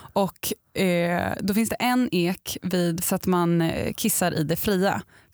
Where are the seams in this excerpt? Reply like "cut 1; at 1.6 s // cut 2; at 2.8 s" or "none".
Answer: cut 1; at 3.0 s